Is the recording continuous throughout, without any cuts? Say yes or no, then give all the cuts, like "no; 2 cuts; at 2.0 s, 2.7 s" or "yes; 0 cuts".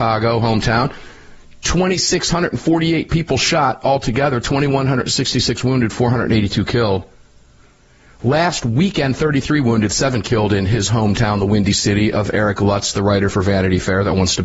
yes; 0 cuts